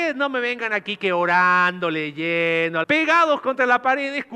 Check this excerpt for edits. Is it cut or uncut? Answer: cut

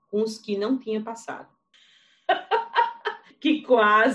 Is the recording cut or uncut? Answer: cut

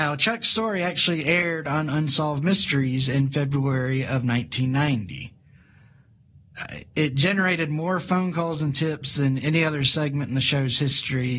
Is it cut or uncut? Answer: uncut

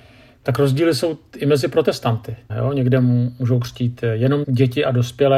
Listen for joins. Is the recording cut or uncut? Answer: cut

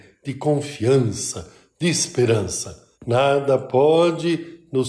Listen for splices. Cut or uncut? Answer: cut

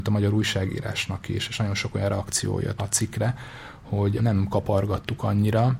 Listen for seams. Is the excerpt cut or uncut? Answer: cut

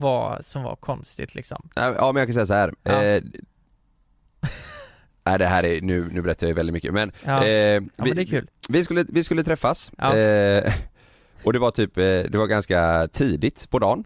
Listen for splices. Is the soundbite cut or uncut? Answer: uncut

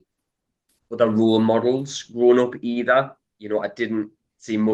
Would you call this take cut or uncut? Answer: uncut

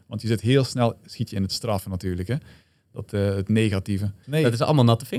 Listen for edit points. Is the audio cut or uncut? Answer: cut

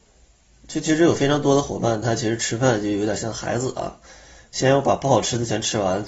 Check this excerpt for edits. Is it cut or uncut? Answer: uncut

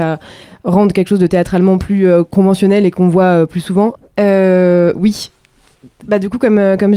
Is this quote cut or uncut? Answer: cut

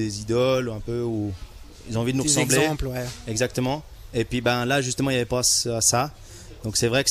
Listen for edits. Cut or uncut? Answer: uncut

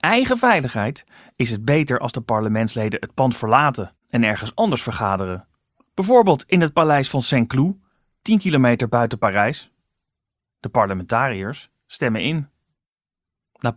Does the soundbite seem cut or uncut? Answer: uncut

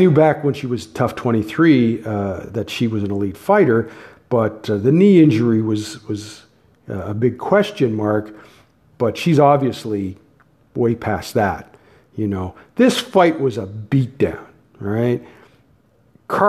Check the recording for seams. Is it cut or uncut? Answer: uncut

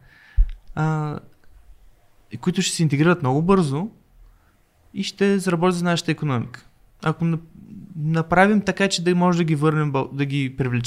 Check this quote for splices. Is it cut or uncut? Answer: uncut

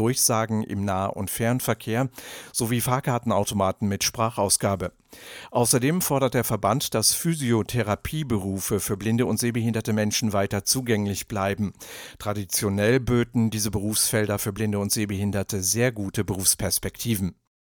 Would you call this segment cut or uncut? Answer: uncut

